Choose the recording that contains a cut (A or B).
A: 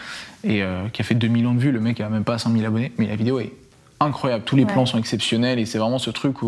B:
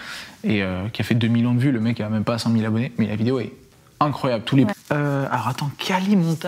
B